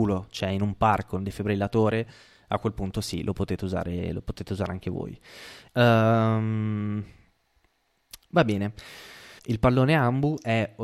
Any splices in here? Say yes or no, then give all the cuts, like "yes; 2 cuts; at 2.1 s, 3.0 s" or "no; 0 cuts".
yes; 2 cuts; at 5.7 s, 9.4 s